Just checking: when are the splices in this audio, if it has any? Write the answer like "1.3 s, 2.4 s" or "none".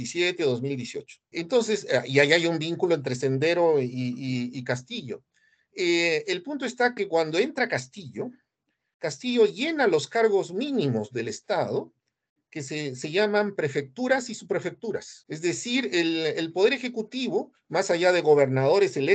none